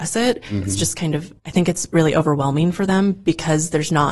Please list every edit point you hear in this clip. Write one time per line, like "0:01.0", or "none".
0:01.4